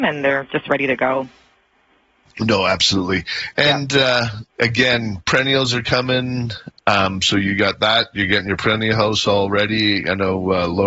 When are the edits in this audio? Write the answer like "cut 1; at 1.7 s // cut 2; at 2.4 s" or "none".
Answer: cut 1; at 4.5 s